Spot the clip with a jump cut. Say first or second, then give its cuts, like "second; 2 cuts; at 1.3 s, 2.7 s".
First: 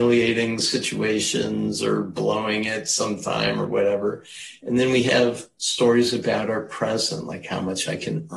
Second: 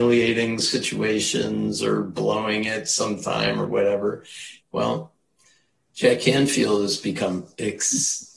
second; 1 cut; at 4.6 s